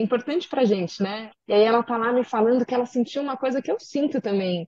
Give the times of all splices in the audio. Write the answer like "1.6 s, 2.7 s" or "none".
1.3 s